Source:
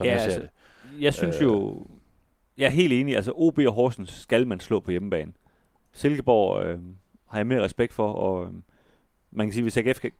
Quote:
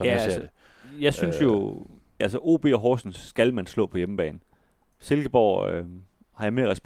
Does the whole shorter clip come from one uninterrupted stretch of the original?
no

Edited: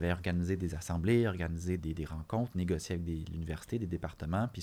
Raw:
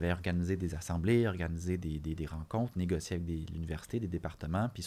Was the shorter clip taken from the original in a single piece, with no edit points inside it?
no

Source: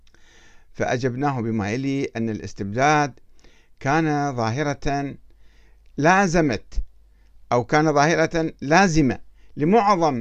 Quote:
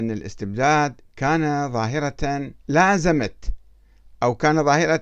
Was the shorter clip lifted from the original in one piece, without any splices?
no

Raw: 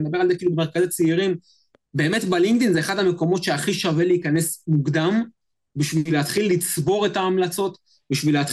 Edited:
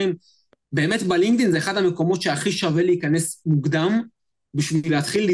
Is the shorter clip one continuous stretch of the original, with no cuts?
yes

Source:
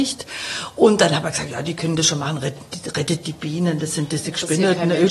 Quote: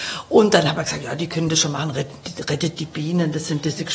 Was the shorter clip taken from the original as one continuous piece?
yes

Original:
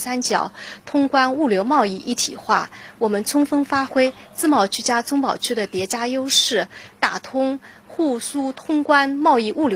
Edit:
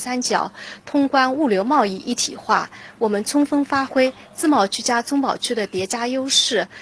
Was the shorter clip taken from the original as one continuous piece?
yes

